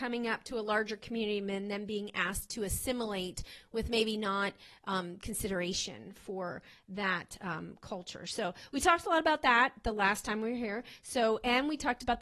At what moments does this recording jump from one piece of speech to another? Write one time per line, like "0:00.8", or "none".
none